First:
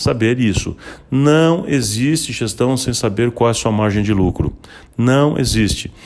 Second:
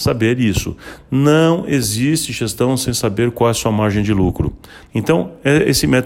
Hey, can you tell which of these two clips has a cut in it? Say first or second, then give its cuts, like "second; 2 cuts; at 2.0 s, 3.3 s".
second; 1 cut; at 4.9 s